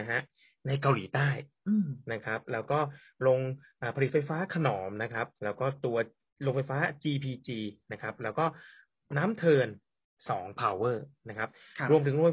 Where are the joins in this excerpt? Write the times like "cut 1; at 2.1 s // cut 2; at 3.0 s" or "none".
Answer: cut 1; at 5.3 s